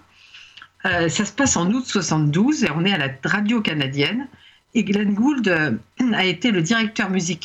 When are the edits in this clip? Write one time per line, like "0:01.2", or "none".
none